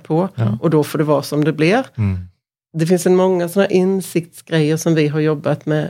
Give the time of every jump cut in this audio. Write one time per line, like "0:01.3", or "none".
none